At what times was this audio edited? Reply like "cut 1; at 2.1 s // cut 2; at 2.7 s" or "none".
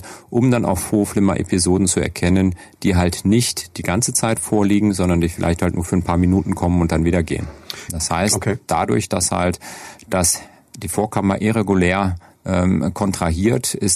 cut 1; at 7.9 s